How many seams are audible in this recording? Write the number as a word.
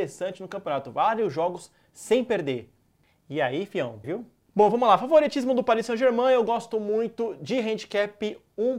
one